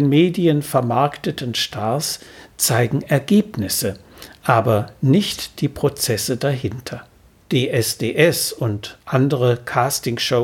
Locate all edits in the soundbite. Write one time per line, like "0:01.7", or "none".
0:07.4